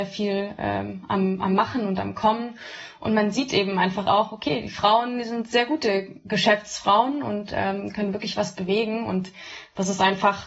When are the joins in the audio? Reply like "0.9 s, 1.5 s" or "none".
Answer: none